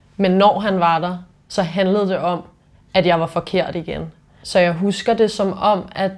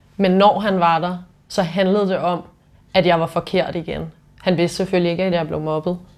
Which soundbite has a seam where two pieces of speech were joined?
second; 1 cut; at 4.3 s

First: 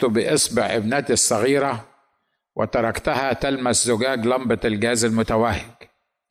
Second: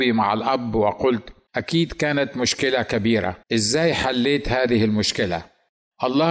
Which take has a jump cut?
second; 2 cuts; at 1.5 s, 3.4 s

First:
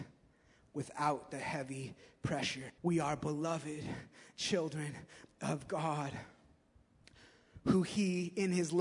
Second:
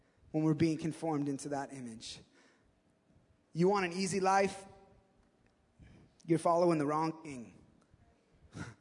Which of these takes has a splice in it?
first; 1 cut; at 2.8 s

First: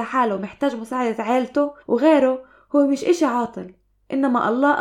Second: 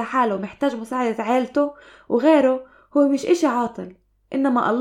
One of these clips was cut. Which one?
first; 1 cut; at 1.8 s

